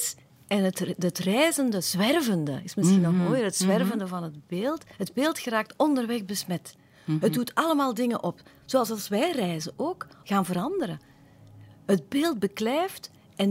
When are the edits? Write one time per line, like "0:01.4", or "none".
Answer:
0:04.9
0:10.2

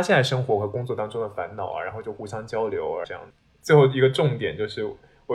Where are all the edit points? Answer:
0:03.0

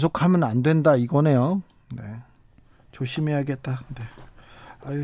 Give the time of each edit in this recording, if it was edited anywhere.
none

